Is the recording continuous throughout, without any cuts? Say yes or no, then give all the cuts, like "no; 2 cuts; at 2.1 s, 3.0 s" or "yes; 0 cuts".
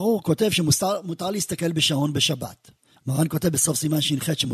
no; 1 cut; at 3.0 s